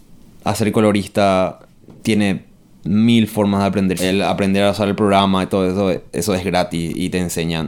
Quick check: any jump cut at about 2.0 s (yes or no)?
yes